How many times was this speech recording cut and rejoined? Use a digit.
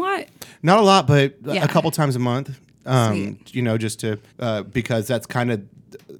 1